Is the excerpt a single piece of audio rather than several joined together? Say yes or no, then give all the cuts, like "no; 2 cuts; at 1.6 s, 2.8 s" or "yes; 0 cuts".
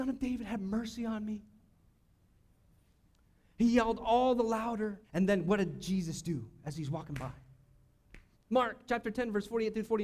no; 2 cuts; at 5.0 s, 8.3 s